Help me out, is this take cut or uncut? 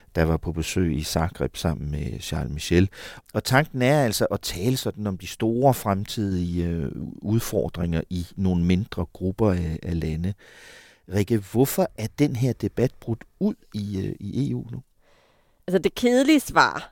cut